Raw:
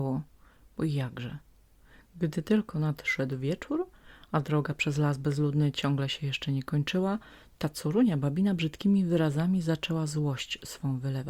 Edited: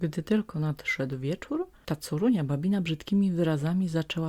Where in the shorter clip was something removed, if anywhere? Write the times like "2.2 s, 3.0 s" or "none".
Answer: 1.8 s